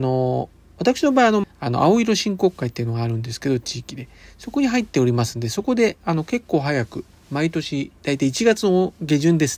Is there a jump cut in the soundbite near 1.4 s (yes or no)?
yes